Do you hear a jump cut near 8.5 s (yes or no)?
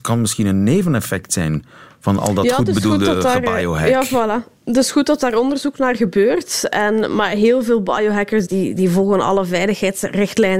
yes